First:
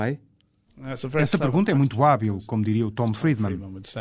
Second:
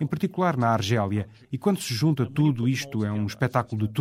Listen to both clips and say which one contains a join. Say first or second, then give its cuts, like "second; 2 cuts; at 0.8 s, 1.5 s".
second; 1 cut; at 1.4 s